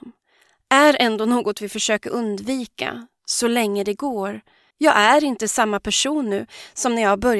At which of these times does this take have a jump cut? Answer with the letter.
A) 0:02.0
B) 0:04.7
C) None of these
B